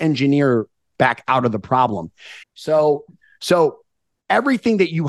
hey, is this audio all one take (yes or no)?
no